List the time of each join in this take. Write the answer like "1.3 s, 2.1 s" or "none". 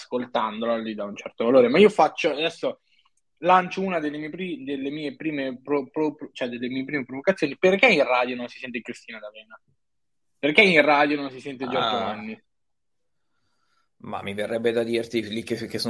none

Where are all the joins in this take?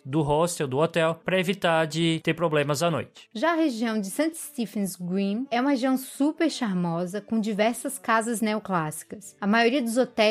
none

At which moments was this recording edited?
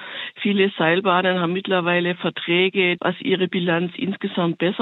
3.0 s

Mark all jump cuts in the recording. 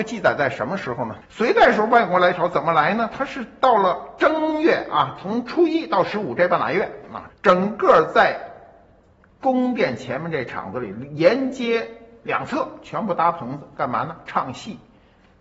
1.2 s, 7.3 s

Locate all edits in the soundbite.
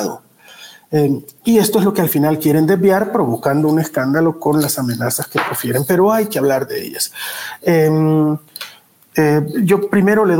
none

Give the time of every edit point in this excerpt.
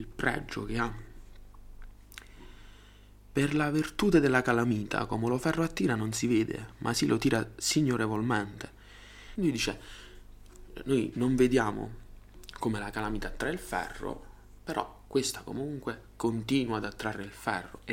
9.4 s

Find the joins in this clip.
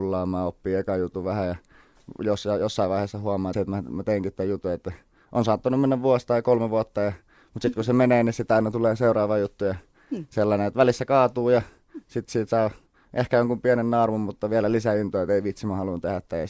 3.5 s

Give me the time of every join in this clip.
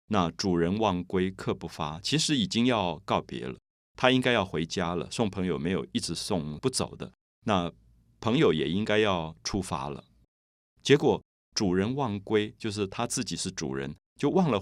none

